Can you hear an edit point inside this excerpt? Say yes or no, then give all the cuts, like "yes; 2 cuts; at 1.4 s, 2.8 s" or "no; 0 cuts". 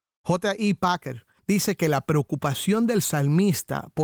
yes; 1 cut; at 1.4 s